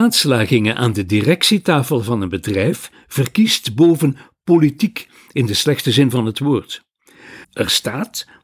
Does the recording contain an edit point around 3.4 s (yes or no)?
no